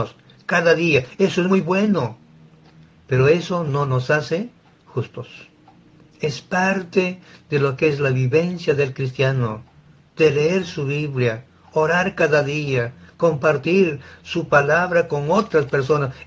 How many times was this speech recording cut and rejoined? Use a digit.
0